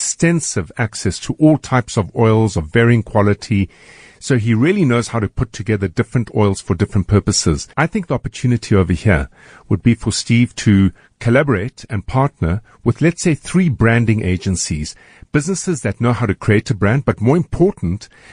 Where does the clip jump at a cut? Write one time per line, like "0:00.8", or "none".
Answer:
0:07.7